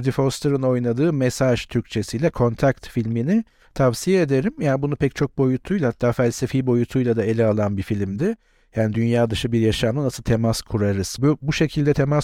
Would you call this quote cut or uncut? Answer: cut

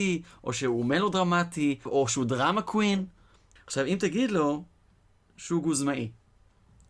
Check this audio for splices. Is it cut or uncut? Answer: cut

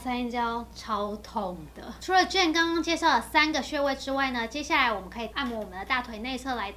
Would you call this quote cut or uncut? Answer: cut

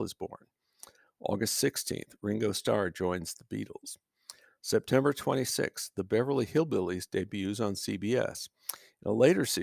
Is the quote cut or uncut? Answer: uncut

